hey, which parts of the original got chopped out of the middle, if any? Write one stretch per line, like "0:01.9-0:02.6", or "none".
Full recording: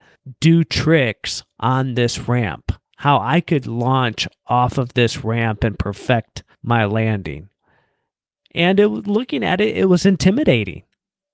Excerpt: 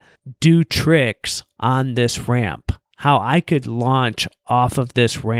none